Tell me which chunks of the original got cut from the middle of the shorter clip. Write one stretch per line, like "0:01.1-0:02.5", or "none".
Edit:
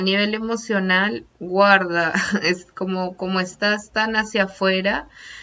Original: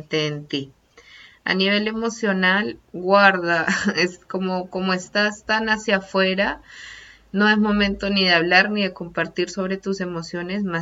none

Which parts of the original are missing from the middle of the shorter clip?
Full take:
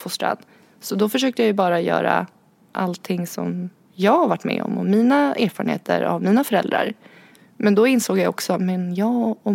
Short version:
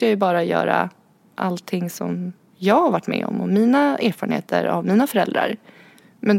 none

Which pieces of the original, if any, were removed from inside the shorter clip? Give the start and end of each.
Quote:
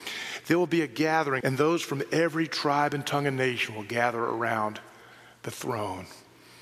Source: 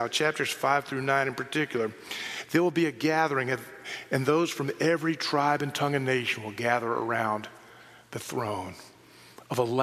0:03.4-0:04.1

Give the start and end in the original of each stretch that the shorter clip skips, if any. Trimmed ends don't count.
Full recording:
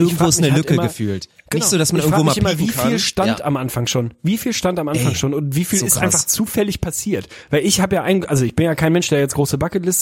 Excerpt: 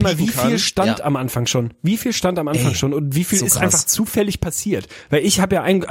none

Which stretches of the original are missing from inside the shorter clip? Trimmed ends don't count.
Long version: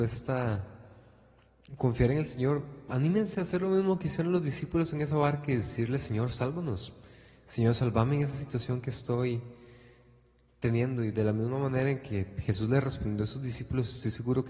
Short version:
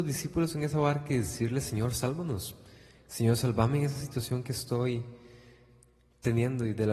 none

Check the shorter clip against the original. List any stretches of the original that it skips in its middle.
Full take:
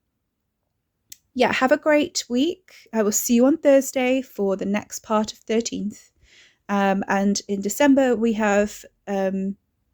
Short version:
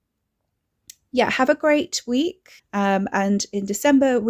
0:02.8-0:06.5

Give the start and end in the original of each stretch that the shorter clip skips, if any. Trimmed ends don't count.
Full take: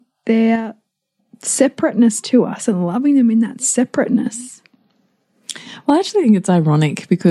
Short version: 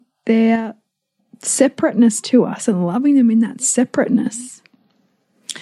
none

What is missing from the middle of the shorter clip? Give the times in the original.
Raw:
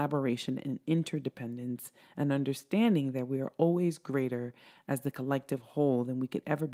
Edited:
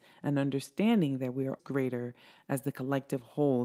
0:03.5-0:04.0

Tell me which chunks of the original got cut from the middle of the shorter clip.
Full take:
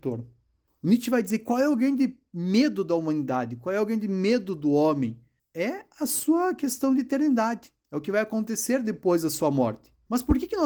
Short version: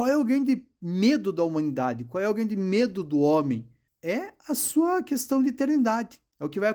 none

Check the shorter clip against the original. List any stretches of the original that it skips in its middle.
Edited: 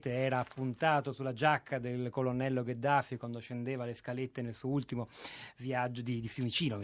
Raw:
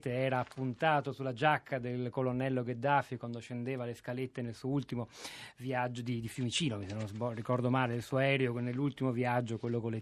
none

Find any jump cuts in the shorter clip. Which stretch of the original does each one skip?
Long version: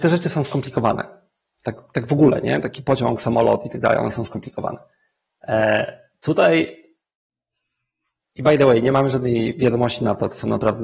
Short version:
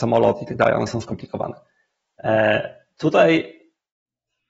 none

